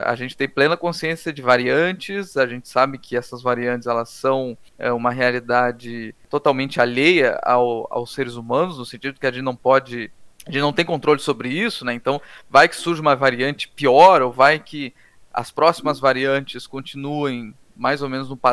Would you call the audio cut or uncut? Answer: uncut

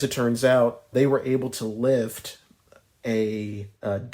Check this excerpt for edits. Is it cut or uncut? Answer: cut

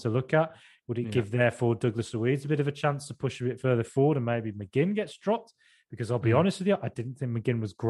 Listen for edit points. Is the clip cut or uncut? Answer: uncut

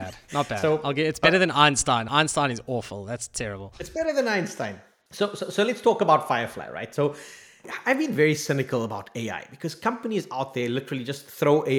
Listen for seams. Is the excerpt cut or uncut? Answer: uncut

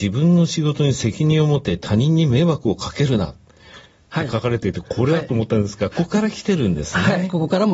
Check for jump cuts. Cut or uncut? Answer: cut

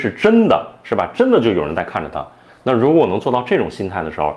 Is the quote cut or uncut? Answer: cut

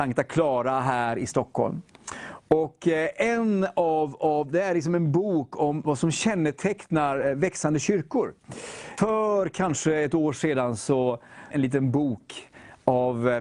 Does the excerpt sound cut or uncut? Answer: cut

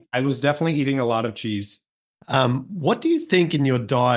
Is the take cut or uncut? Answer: cut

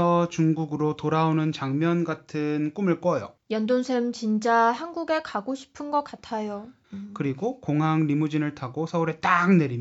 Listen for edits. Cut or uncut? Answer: cut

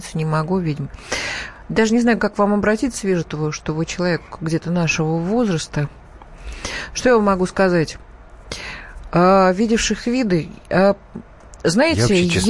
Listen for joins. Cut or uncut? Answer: uncut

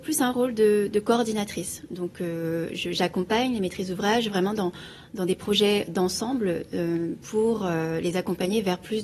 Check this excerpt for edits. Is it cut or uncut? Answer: uncut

